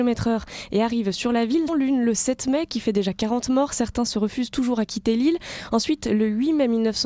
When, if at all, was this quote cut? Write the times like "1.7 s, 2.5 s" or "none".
1.7 s

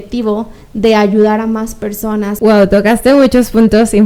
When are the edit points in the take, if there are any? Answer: 2.4 s

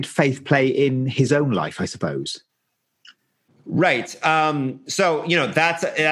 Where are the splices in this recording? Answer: none

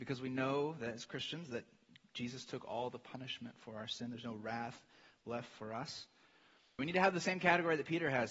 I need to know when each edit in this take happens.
6.8 s

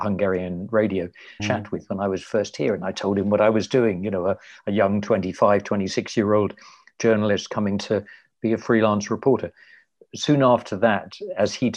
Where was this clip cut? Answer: 1.4 s

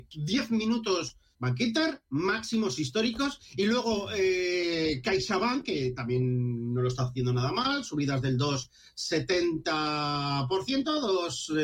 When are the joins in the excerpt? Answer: 1.3 s

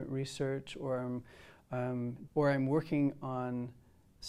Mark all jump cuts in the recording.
2.3 s

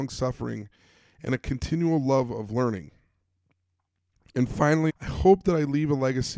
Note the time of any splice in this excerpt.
4.9 s

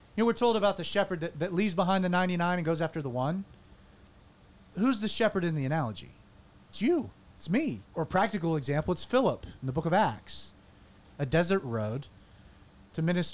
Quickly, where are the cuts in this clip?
7.9 s, 11.0 s

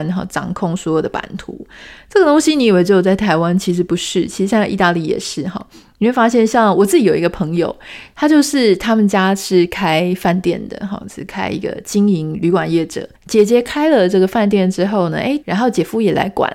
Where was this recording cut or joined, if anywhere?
13.1 s, 15.4 s

